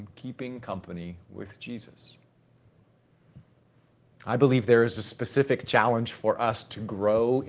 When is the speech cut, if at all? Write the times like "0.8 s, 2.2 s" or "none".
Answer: none